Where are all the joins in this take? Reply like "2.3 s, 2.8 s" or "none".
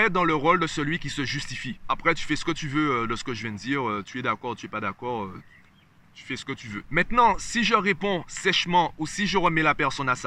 none